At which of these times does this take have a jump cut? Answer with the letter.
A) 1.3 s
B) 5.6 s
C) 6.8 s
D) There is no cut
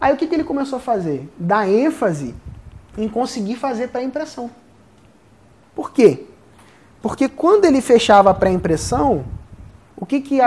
B